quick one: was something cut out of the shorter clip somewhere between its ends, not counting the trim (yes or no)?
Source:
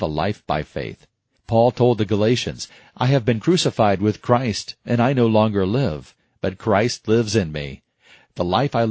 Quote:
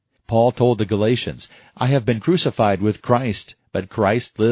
yes